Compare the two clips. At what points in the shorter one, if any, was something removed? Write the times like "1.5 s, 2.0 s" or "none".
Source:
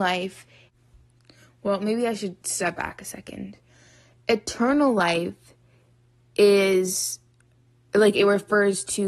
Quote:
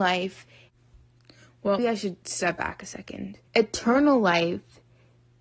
1.8 s, 3.5 s